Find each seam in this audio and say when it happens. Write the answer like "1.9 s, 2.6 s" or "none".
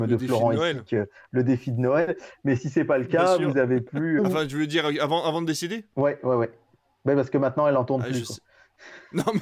4.2 s